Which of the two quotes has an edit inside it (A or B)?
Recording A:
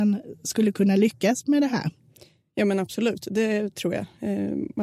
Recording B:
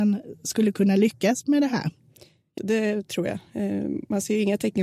B